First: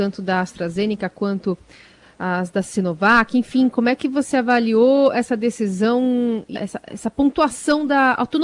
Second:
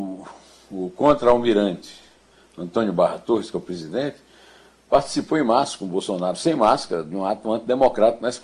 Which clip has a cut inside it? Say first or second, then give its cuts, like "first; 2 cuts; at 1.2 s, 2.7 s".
first; 1 cut; at 6.6 s